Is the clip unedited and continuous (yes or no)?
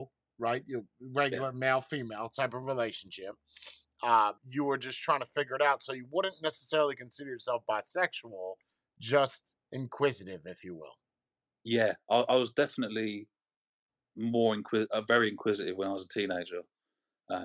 no